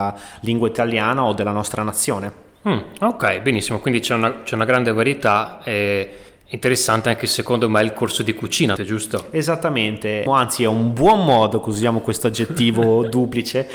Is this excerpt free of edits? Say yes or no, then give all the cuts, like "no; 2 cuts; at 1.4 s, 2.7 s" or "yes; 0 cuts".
no; 2 cuts; at 8.8 s, 10.3 s